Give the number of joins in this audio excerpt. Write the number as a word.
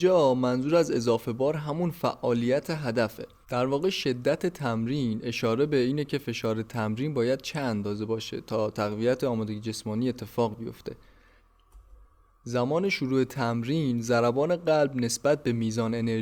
one